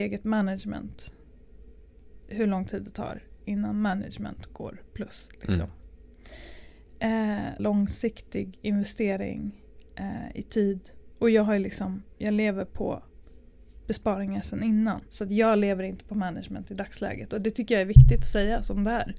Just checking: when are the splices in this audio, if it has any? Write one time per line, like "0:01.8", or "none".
0:07.6
0:15.1